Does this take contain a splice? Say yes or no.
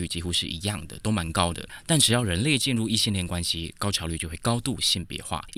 no